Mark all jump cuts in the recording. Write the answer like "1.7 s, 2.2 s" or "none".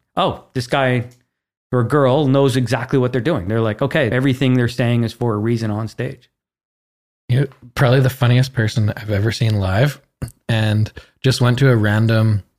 4.1 s